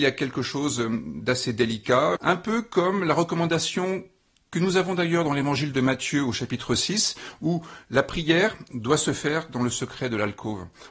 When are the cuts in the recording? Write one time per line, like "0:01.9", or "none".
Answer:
0:02.2